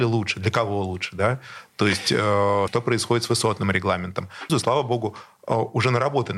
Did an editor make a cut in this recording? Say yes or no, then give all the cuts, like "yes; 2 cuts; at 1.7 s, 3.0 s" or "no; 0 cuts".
yes; 2 cuts; at 2.7 s, 4.5 s